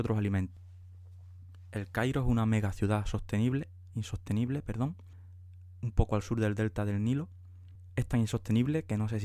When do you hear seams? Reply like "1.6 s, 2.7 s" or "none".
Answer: none